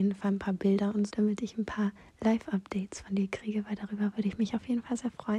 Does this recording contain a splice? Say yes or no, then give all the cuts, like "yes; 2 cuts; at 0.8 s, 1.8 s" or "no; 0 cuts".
yes; 1 cut; at 1.1 s